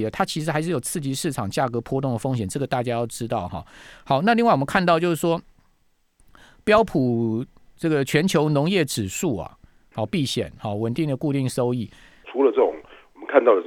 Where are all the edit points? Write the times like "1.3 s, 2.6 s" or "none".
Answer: 9.9 s, 12.2 s